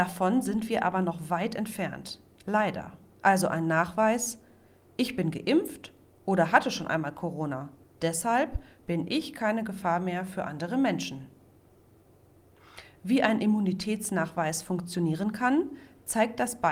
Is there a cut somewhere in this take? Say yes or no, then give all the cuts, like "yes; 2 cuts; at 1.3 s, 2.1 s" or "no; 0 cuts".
yes; 1 cut; at 3.1 s